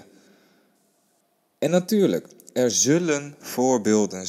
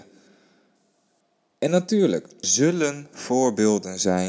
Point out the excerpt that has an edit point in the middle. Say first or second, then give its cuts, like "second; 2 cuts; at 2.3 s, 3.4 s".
second; 1 cut; at 2.4 s